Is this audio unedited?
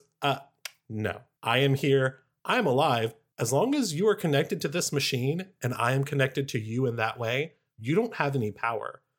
yes; 0 cuts

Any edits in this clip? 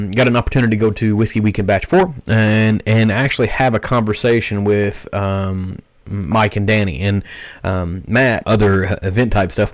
yes; 1 cut; at 8.4 s

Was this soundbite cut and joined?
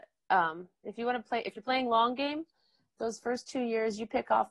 no; 0 cuts

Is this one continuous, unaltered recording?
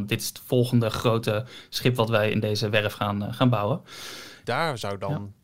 no; 1 cut; at 4.4 s

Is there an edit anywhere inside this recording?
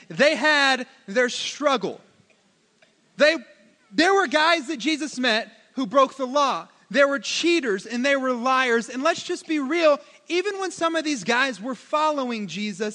no; 0 cuts

